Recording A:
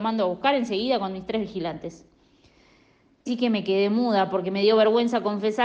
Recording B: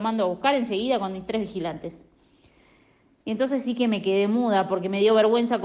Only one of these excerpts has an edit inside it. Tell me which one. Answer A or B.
A